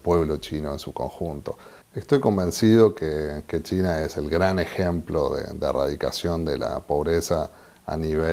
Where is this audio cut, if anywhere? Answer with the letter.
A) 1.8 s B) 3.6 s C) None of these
A